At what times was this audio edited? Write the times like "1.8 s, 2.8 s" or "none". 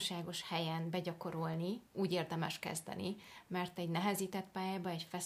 1.9 s